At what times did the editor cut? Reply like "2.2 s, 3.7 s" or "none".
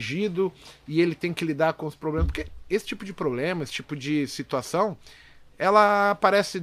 none